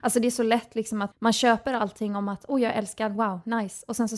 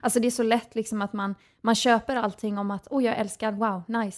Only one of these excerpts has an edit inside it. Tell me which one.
first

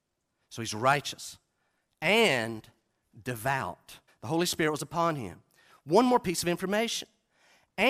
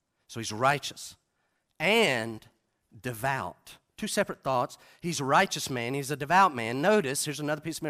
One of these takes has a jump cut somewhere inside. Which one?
first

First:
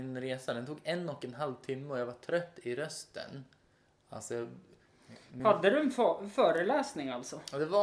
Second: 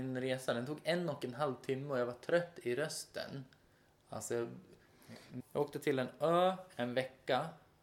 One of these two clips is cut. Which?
second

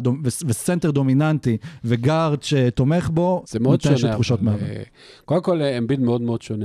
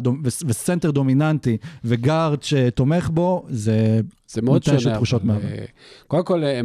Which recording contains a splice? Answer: first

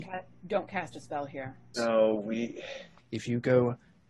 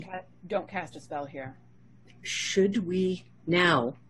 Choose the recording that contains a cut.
first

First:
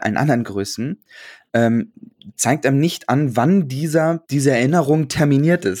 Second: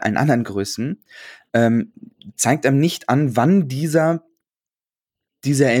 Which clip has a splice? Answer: first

